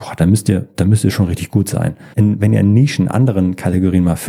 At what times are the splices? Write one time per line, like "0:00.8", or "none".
0:02.1